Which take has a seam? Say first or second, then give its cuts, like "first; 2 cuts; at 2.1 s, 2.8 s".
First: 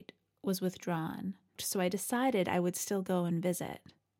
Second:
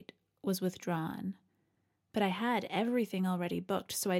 first; 1 cut; at 1.6 s